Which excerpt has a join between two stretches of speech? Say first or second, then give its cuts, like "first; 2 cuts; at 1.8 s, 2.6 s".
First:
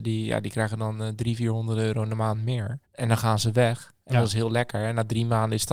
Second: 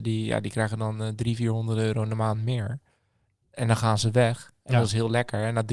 first; 1 cut; at 2.8 s